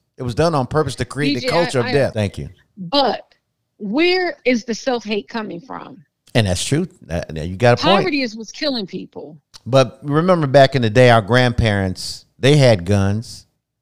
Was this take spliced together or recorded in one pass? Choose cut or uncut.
cut